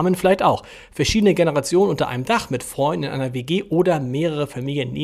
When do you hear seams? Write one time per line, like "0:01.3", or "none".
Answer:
none